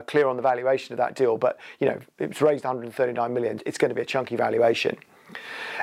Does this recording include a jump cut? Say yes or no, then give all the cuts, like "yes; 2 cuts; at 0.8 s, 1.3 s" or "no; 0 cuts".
yes; 1 cut; at 3.6 s